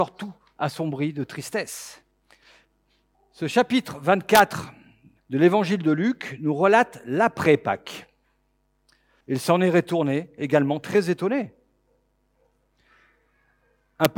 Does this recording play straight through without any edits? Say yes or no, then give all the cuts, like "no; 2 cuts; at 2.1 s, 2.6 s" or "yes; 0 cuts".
no; 2 cuts; at 3.1 s, 9.2 s